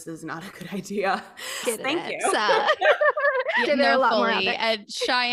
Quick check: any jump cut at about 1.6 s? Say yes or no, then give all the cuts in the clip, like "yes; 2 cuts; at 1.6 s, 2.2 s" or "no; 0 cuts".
yes; 2 cuts; at 1.6 s, 3.7 s